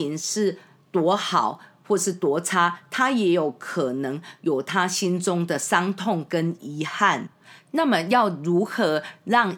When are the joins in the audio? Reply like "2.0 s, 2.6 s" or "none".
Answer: none